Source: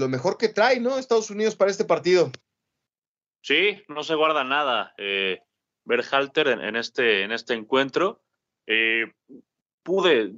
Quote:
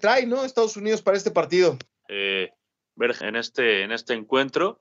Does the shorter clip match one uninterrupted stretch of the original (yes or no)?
no